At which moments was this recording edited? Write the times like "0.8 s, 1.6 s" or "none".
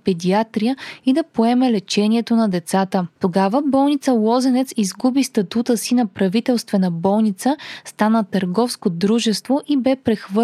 3.2 s